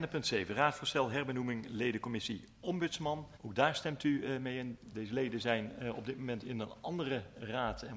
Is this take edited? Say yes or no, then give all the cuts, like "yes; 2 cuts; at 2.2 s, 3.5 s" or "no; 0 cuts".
yes; 1 cut; at 3.3 s